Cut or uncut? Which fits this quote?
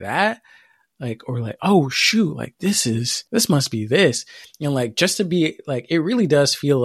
cut